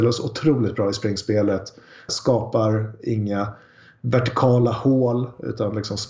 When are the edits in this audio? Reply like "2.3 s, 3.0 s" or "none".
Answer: 2.1 s